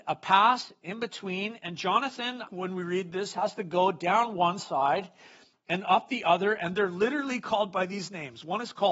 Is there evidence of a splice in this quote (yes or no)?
yes